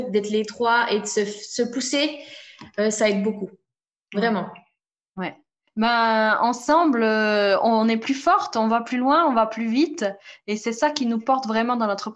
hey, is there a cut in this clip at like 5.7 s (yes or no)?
yes